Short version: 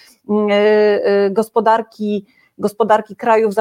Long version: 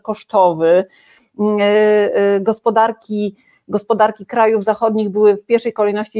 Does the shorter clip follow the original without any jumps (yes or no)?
yes